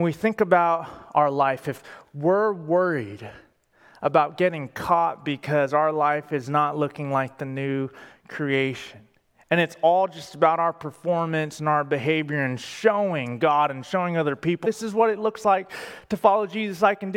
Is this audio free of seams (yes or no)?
no